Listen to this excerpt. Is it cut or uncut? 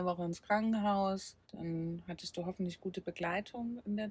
cut